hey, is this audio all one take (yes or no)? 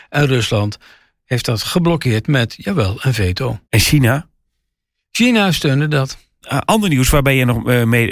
no